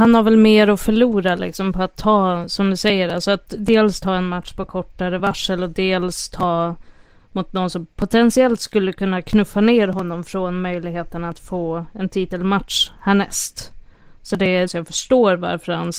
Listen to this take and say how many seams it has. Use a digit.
1